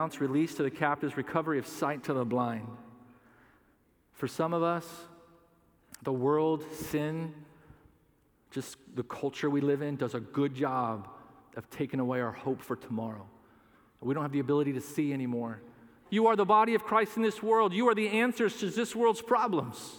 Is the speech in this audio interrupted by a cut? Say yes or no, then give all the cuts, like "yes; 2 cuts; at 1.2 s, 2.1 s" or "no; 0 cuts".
yes; 1 cut; at 16.1 s